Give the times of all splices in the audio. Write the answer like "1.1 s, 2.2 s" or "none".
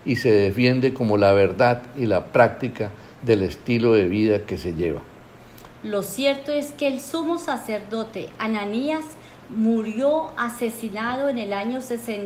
5.7 s